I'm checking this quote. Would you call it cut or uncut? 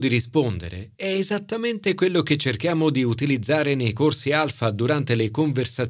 uncut